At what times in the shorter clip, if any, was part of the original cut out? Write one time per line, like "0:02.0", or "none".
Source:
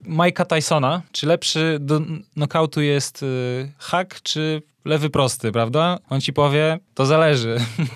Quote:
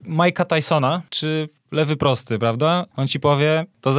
0:01.1